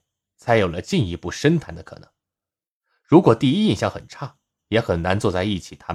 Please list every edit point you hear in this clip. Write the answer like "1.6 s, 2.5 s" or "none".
4.6 s